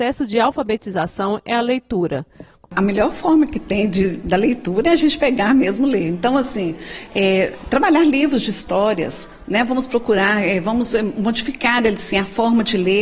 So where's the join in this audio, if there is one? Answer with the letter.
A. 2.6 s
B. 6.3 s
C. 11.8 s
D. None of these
A